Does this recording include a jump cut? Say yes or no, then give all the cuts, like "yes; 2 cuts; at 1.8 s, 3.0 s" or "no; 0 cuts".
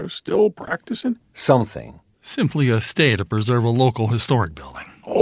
yes; 1 cut; at 2.1 s